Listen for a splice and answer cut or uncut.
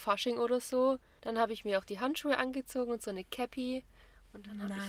cut